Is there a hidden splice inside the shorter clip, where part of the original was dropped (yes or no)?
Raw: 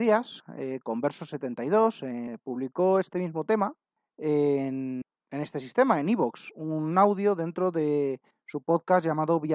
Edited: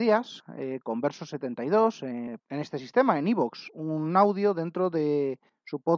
yes